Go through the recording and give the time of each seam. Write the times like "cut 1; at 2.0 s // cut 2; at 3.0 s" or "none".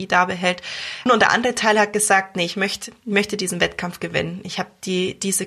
cut 1; at 1.1 s